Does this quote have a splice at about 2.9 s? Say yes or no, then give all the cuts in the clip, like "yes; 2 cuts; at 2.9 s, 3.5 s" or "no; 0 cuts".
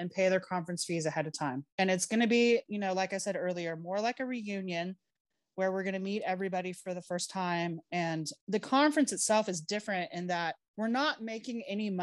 no; 0 cuts